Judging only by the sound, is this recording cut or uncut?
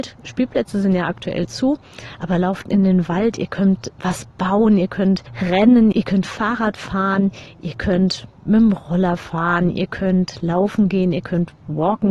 uncut